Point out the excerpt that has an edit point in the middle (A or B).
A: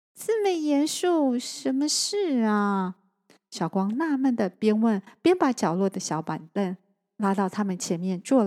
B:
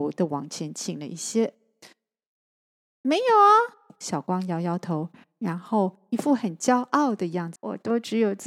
B